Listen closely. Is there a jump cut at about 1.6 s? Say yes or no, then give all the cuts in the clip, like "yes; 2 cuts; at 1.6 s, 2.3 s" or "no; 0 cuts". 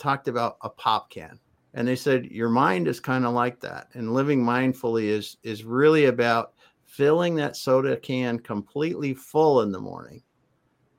yes; 1 cut; at 1.6 s